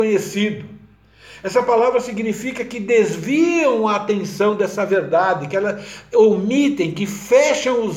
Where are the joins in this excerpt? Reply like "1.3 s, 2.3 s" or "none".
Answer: none